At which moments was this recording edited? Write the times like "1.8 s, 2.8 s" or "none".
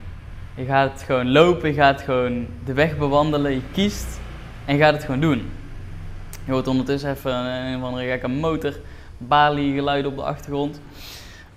none